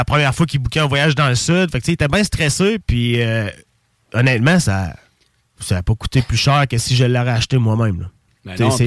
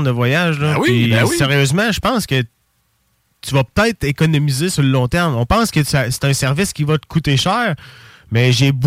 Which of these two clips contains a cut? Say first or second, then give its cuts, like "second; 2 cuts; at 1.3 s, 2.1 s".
first; 1 cut; at 2.8 s